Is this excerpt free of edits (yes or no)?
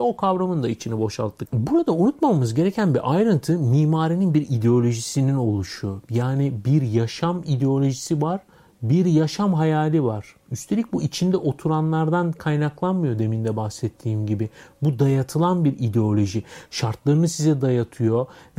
yes